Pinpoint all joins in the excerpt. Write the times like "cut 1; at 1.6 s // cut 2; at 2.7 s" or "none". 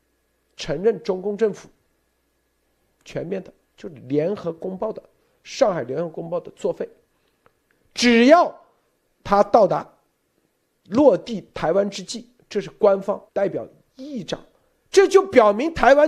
cut 1; at 13.3 s